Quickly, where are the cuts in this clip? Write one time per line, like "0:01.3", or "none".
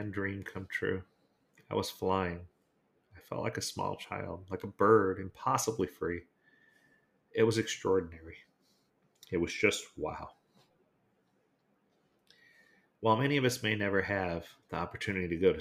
none